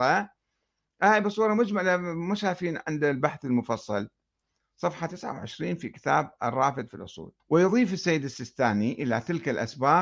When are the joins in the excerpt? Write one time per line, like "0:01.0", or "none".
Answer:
0:07.4